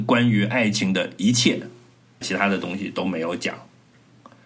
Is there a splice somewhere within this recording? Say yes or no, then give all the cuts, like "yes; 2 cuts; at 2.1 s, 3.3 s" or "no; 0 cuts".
yes; 1 cut; at 2.2 s